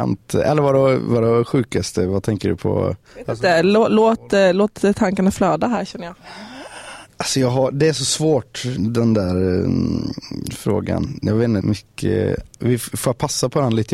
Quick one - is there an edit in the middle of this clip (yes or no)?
yes